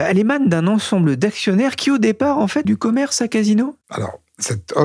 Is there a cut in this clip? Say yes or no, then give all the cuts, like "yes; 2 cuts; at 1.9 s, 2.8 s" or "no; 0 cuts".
yes; 2 cuts; at 2.6 s, 3.8 s